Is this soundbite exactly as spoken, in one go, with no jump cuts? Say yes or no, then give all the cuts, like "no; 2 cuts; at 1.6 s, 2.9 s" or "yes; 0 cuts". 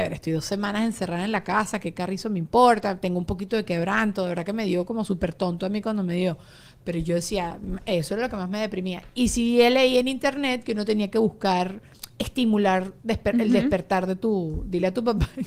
yes; 0 cuts